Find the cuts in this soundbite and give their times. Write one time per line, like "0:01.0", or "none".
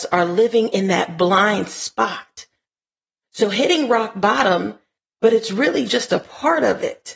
0:05.0